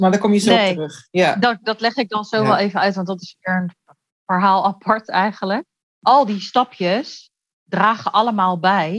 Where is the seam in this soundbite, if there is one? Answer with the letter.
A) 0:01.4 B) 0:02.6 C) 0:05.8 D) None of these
C